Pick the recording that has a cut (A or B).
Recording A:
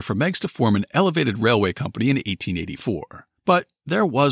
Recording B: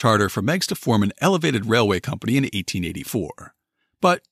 A